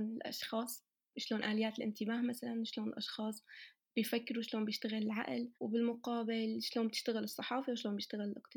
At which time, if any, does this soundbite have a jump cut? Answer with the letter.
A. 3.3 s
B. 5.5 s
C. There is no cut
B